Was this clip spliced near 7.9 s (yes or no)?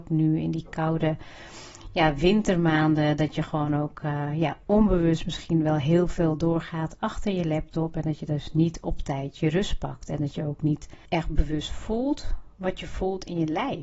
no